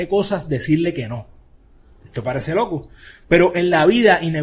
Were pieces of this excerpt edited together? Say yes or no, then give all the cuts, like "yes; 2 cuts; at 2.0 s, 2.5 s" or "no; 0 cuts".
no; 0 cuts